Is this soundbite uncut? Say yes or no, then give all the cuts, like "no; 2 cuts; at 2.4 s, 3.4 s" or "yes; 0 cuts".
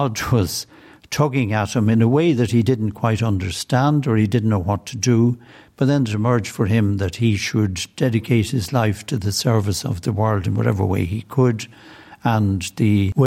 yes; 0 cuts